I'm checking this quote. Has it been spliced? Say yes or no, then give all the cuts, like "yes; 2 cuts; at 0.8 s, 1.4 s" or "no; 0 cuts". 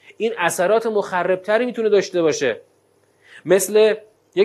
no; 0 cuts